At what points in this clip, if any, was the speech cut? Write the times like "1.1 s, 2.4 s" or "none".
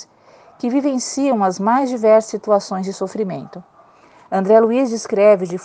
none